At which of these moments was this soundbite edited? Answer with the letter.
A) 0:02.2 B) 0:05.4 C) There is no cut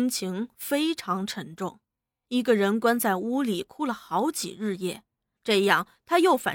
B